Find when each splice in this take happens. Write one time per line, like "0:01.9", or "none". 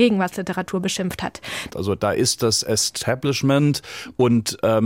0:01.7